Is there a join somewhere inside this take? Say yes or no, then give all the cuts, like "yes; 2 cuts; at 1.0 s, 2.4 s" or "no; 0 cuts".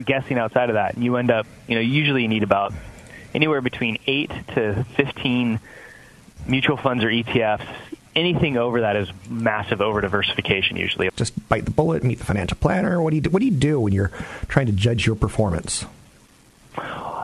yes; 2 cuts; at 8.1 s, 11.1 s